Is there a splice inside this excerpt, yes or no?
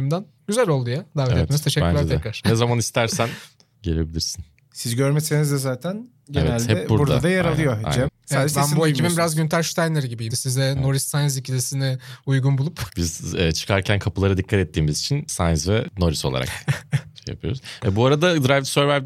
yes